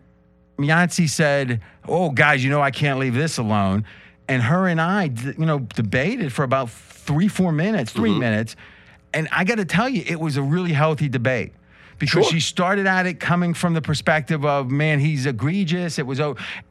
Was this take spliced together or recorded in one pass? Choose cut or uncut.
uncut